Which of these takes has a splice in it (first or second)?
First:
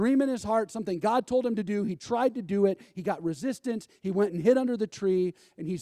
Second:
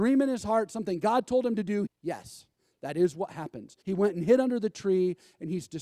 second